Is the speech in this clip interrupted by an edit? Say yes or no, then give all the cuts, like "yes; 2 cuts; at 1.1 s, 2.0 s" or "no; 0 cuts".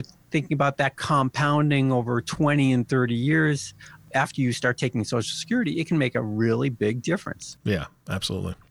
no; 0 cuts